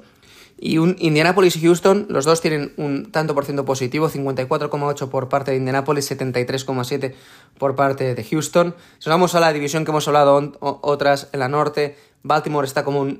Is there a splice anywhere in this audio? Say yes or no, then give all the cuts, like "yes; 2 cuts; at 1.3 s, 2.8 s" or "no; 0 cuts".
yes; 1 cut; at 8.9 s